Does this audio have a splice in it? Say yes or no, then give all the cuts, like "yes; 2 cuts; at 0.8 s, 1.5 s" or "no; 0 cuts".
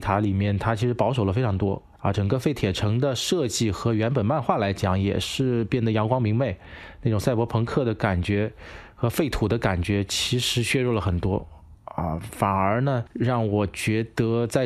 no; 0 cuts